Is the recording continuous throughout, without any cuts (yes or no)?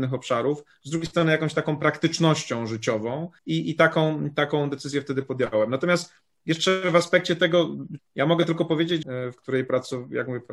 no